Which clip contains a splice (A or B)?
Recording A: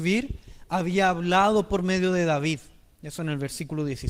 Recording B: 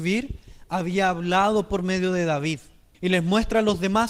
B